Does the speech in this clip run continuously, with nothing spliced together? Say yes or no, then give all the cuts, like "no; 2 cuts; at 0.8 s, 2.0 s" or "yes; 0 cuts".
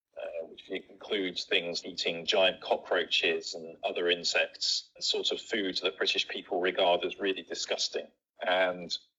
no; 2 cuts; at 1.8 s, 5.0 s